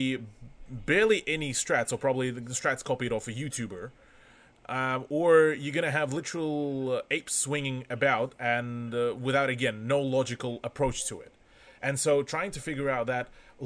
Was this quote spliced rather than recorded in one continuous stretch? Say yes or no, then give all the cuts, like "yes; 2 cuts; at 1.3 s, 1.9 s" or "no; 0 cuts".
no; 0 cuts